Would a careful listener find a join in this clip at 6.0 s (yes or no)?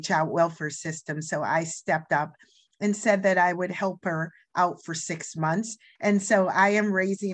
yes